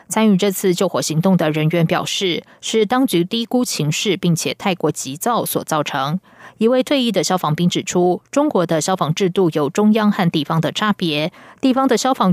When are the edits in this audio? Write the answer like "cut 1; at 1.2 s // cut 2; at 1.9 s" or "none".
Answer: none